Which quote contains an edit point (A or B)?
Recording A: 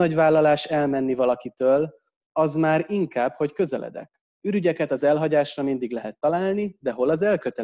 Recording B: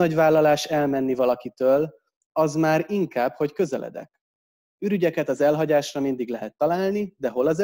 A